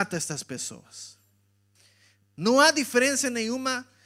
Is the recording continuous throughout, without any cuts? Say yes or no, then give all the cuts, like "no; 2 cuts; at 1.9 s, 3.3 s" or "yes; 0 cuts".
yes; 0 cuts